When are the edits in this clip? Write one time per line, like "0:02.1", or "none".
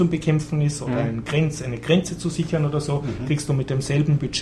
none